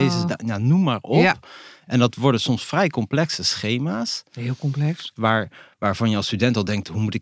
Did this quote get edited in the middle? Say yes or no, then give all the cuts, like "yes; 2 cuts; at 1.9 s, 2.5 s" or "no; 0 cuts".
yes; 1 cut; at 5.2 s